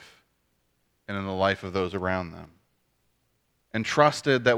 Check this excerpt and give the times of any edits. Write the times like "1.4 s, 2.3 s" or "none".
3.6 s